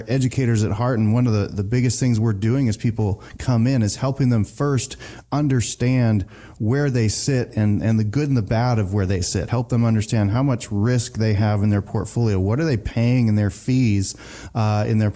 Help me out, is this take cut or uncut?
uncut